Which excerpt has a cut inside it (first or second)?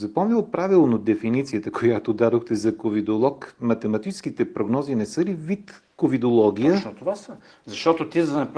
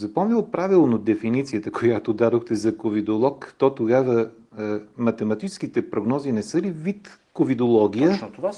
first